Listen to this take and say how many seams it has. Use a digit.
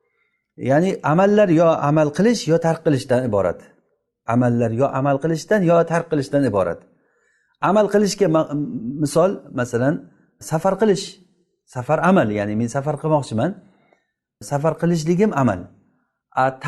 0